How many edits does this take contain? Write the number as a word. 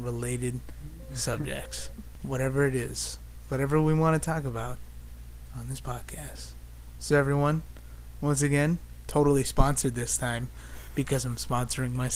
zero